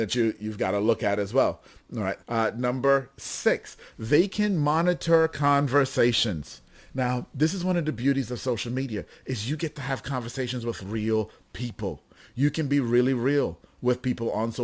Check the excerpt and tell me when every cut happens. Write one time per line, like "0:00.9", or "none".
0:02.2